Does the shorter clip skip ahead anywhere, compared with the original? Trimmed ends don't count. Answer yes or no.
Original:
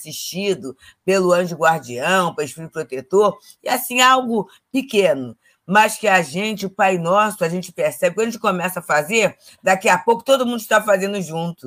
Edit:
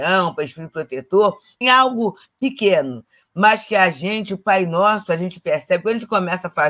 yes